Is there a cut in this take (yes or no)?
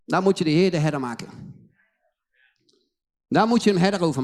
no